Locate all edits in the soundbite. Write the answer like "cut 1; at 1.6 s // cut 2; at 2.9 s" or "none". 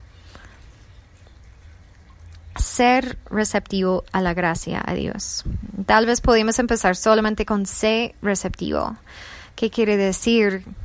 cut 1; at 2.5 s